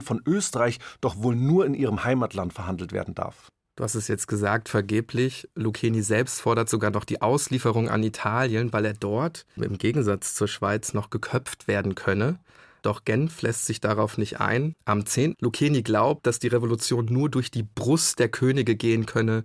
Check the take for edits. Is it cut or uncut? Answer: cut